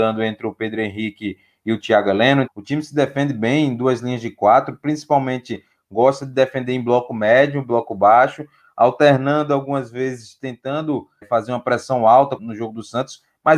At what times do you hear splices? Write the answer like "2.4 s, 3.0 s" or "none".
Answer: 2.5 s, 11.2 s, 12.4 s